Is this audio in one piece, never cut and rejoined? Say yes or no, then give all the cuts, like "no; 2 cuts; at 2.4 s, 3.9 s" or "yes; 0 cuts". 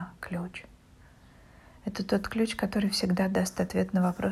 yes; 0 cuts